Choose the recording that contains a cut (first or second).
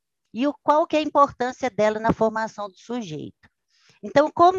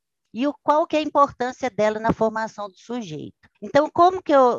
second